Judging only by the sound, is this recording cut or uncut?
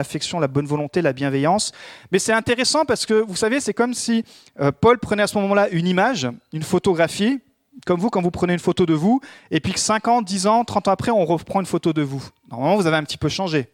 uncut